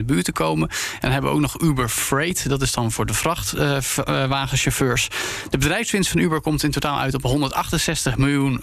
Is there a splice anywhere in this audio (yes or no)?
no